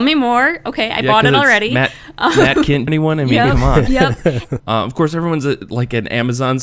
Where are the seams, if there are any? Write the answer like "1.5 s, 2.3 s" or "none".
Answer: 2.9 s, 4.6 s